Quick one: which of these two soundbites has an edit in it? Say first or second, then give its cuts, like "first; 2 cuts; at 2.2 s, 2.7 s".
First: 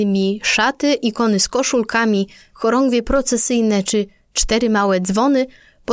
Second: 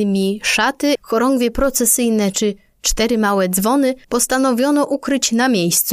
second; 2 cuts; at 1.0 s, 4.0 s